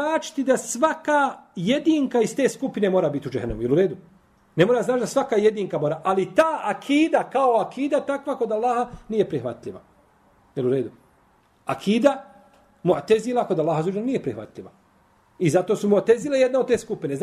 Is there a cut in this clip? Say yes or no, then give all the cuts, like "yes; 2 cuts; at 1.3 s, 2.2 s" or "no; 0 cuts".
no; 0 cuts